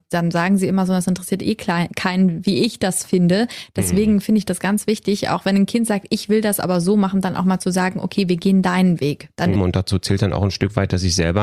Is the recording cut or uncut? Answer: cut